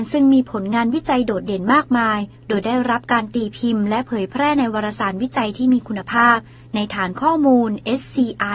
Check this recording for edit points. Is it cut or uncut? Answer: uncut